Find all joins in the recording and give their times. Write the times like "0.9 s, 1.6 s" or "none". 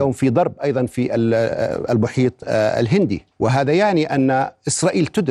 3.3 s

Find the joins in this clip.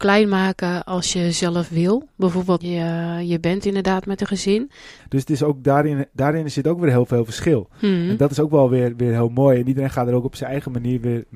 2.6 s, 5.0 s

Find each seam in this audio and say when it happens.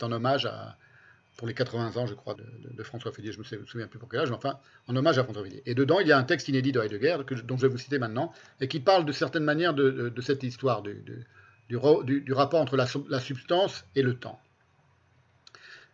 2.4 s

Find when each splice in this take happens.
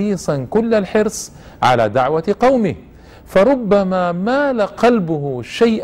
none

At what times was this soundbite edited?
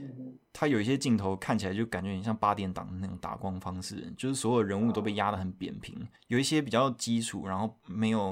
6.2 s

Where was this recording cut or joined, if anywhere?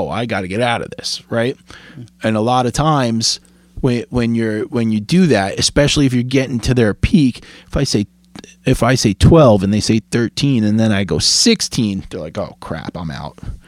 none

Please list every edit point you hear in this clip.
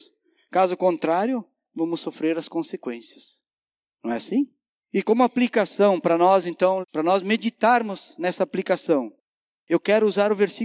6.8 s

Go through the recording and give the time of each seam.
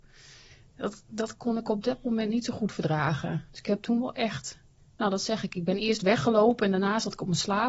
3.5 s

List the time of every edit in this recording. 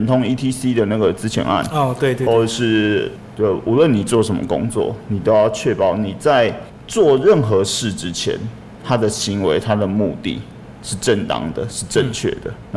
3.3 s

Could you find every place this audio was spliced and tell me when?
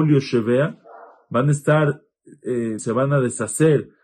2.8 s

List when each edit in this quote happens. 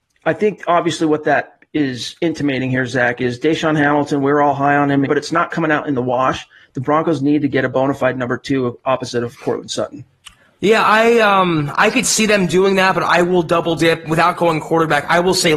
5.1 s

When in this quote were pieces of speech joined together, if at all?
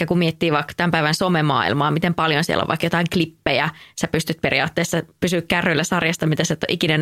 none

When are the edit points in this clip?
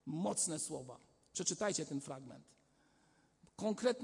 none

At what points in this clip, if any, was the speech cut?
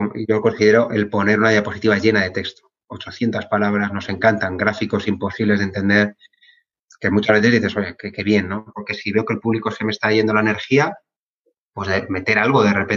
8.7 s

